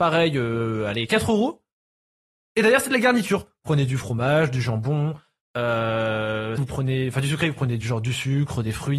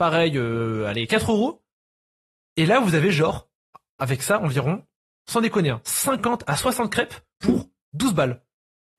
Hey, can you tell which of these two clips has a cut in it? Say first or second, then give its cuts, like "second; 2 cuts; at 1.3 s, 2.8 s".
first; 2 cuts; at 2.4 s, 6.6 s